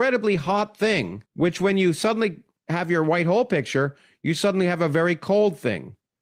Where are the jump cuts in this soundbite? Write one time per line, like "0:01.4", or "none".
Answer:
0:01.3